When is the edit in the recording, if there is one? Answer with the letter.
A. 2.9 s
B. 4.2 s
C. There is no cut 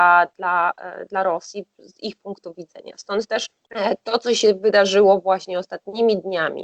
C